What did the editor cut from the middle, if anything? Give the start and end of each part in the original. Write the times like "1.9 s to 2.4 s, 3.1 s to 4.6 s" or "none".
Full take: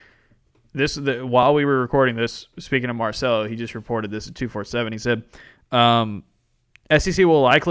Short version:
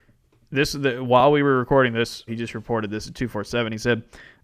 2.5 s to 3.5 s